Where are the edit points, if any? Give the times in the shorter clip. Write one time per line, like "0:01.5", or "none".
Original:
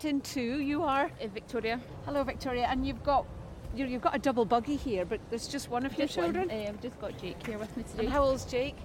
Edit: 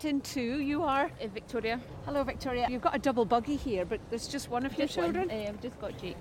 0:02.7